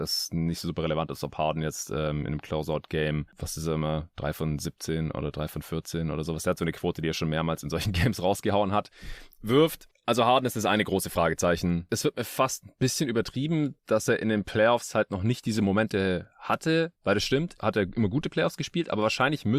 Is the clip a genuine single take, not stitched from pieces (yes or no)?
no